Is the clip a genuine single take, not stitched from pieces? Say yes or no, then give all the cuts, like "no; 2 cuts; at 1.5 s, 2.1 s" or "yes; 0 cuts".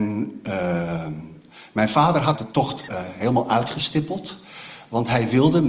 no; 1 cut; at 2.9 s